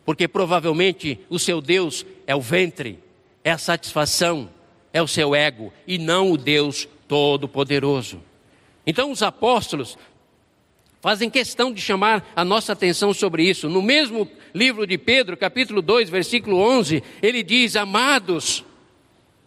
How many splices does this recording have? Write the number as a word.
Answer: zero